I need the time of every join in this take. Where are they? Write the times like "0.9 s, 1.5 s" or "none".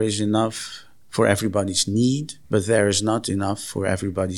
2.4 s